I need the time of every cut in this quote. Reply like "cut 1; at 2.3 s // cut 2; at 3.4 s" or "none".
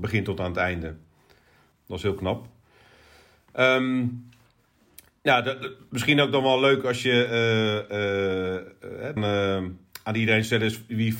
cut 1; at 1.7 s // cut 2; at 9.2 s